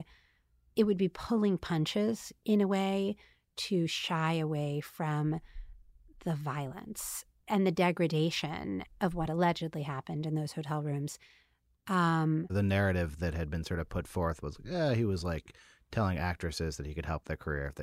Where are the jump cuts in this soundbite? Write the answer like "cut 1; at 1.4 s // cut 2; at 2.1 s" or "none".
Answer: cut 1; at 12.5 s